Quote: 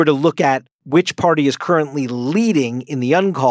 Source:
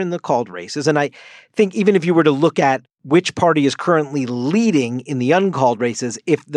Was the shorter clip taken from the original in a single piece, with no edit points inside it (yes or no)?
yes